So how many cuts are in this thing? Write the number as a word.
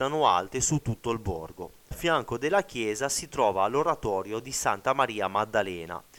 one